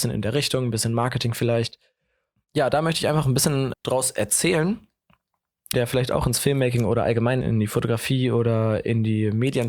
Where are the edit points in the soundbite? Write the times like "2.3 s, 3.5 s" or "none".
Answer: 3.7 s, 5.7 s, 7.4 s